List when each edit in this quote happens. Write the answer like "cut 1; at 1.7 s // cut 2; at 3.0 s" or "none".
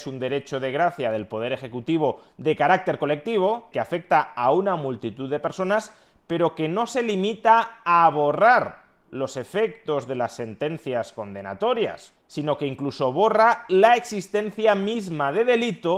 cut 1; at 3.7 s // cut 2; at 12.2 s